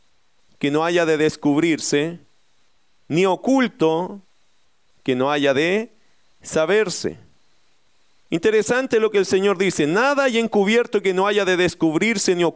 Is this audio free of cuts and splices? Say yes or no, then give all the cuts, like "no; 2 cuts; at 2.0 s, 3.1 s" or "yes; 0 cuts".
yes; 0 cuts